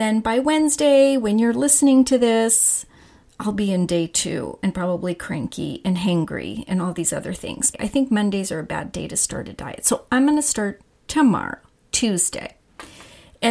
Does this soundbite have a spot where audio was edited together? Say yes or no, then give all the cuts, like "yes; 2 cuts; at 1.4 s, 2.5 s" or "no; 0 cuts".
yes; 1 cut; at 7.7 s